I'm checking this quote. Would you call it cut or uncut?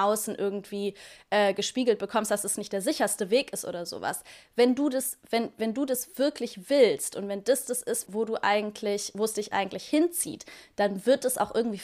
cut